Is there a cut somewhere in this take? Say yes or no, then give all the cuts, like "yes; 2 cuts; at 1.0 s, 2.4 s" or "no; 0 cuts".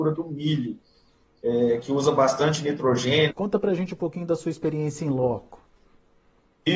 yes; 1 cut; at 3.3 s